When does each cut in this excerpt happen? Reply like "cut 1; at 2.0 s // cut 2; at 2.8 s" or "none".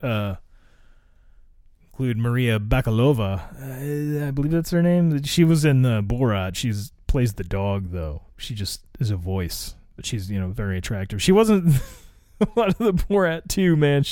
none